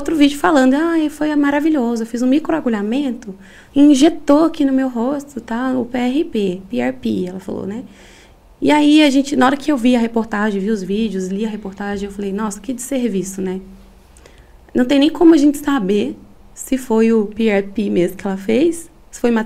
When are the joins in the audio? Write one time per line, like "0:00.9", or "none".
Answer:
none

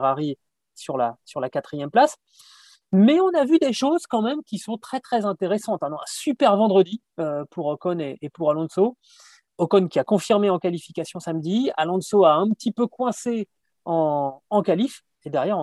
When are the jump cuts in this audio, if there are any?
none

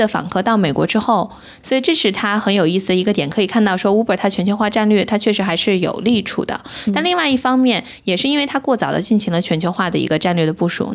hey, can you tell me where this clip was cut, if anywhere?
0:01.6

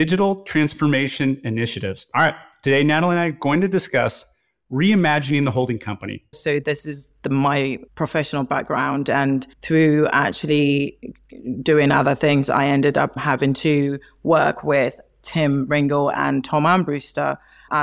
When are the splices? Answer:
0:06.3
0:09.5

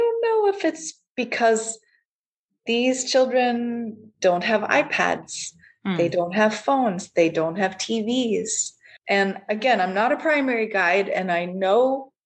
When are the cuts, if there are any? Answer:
0:09.0

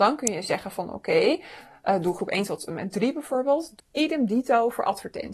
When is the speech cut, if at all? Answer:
0:03.8

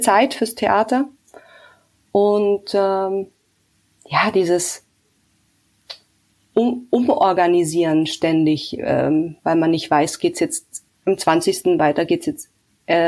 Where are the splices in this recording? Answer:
none

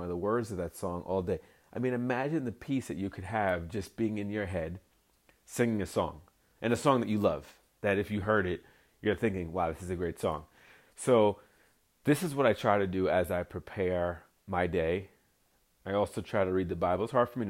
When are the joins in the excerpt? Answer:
none

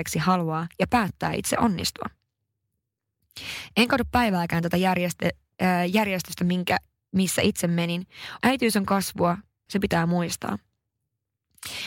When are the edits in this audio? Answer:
0:08.4
0:09.7

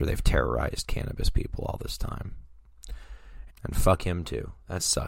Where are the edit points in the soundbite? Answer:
0:03.5

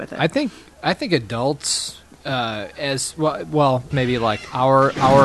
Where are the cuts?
0:02.1
0:03.9

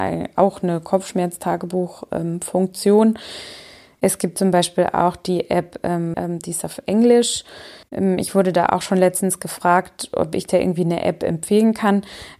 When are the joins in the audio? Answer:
0:04.0
0:06.1
0:07.8

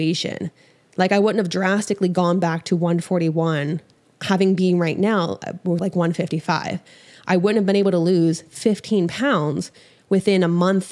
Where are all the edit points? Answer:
0:05.8

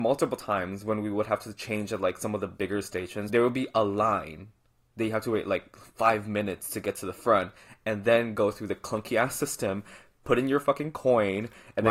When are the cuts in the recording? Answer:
none

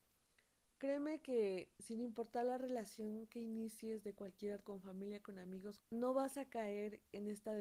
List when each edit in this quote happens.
0:04.6
0:05.8

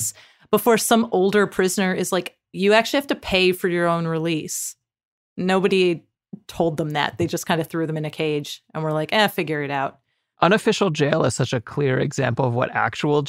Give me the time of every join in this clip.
0:02.5

